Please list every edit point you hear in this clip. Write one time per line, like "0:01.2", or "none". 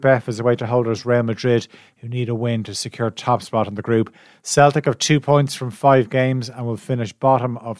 none